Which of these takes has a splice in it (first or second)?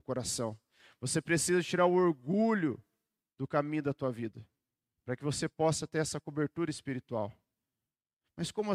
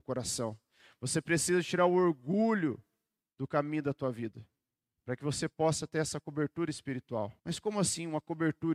second